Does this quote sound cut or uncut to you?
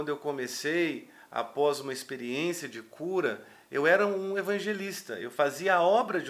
uncut